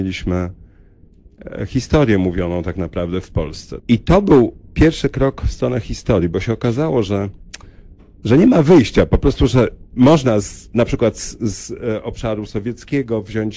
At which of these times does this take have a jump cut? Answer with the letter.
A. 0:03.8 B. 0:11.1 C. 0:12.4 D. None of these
A